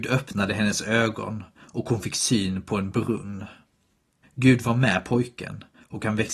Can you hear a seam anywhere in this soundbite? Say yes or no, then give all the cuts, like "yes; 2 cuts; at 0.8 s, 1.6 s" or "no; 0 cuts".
yes; 1 cut; at 4.2 s